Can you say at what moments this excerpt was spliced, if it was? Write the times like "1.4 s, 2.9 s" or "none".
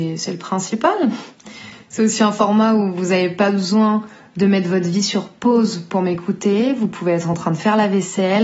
none